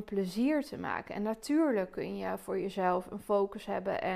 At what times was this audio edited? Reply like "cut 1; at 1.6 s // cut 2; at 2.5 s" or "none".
none